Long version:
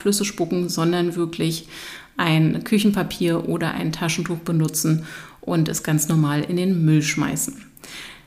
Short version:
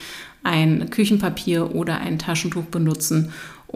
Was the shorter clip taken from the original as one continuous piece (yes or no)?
yes